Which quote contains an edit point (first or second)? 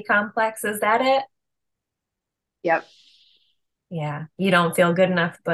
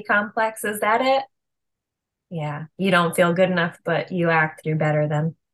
second